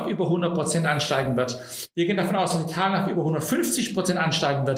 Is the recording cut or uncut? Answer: uncut